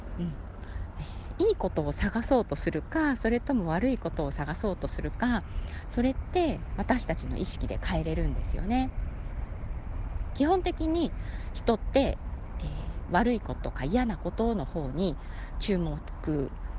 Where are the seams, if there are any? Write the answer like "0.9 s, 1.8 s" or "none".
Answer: 13.6 s